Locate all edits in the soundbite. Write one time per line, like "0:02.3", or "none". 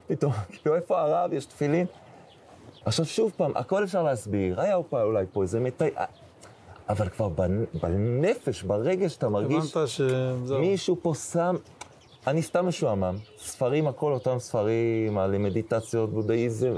0:02.8
0:12.1